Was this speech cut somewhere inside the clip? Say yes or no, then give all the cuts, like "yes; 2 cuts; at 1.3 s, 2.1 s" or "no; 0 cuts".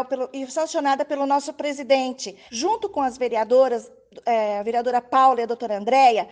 yes; 1 cut; at 2.5 s